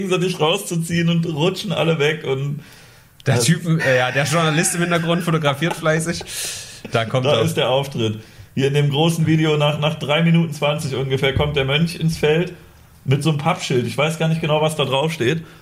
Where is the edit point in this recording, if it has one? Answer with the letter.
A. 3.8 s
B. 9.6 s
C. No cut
A